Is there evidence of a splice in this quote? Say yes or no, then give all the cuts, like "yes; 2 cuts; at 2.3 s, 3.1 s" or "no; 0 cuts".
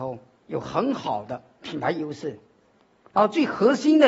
no; 0 cuts